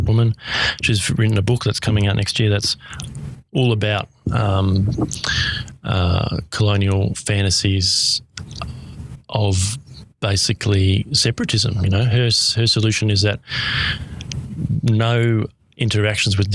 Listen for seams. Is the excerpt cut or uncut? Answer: uncut